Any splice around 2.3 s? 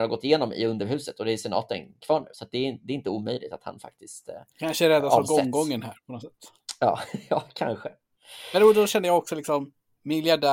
no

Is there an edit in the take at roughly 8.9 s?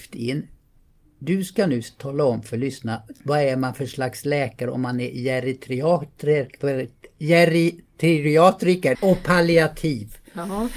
yes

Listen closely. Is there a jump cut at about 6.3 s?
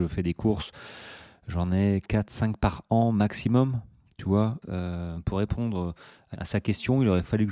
yes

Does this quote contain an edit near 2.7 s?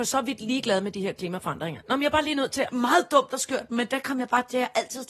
yes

